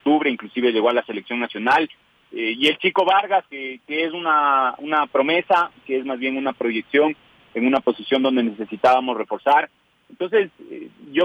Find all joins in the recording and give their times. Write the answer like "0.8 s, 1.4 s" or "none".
3.5 s